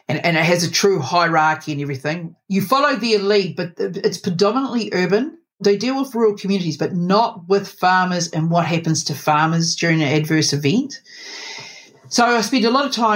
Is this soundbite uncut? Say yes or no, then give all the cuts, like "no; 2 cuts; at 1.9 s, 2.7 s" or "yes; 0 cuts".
yes; 0 cuts